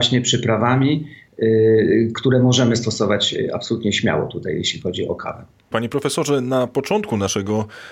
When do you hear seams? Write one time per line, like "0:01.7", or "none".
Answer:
0:05.7